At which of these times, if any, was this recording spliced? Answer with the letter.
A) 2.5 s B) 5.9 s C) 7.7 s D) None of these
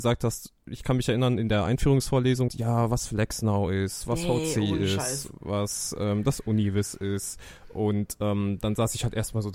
A